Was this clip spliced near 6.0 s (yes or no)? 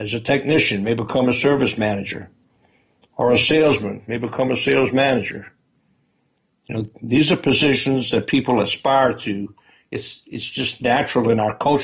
no